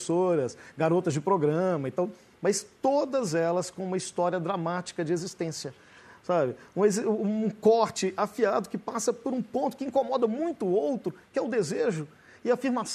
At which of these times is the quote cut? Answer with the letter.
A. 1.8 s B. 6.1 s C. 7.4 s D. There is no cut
D